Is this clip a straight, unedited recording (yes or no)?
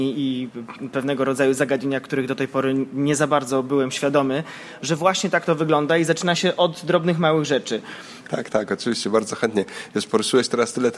no